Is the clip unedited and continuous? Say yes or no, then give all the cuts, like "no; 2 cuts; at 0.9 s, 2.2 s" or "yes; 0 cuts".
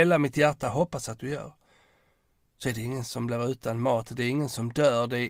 yes; 0 cuts